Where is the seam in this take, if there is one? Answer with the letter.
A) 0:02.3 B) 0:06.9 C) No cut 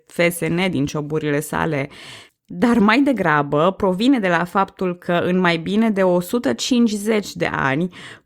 A